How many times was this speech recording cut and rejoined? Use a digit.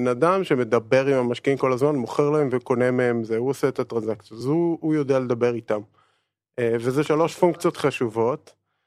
0